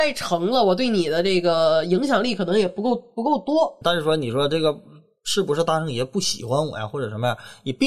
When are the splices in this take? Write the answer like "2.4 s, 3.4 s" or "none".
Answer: 3.8 s